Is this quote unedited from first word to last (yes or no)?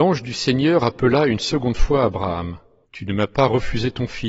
no